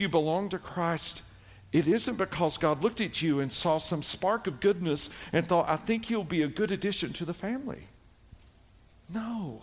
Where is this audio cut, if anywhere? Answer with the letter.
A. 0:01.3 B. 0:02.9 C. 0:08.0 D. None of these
D